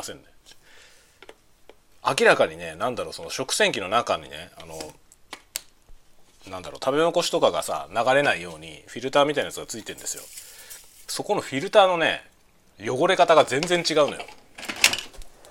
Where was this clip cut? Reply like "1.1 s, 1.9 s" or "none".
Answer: none